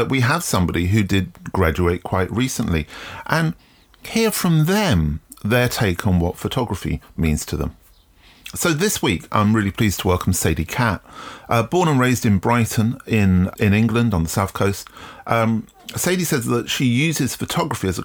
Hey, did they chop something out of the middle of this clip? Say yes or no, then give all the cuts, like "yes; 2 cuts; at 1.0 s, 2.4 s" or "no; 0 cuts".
yes; 1 cut; at 13.5 s